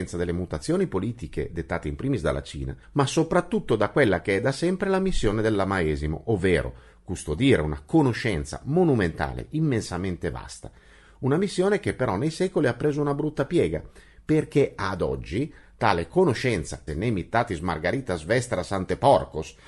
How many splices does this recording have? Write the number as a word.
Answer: two